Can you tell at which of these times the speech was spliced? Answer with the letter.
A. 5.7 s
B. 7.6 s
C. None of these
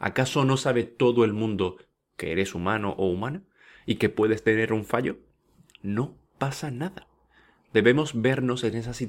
C